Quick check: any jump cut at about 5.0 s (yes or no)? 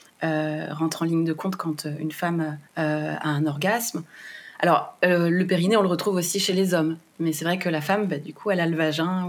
no